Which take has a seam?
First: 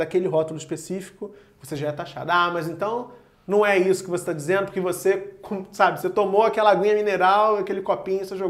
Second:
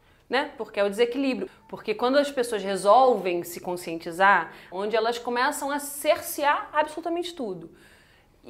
second; 2 cuts; at 1.5 s, 4.7 s

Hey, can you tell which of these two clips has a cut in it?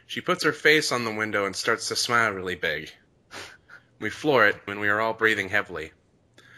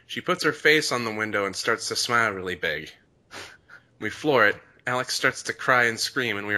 first; 1 cut; at 4.7 s

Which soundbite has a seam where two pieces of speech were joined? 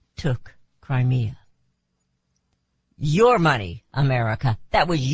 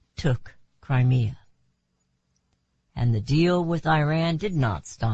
first; 1 cut; at 2.9 s

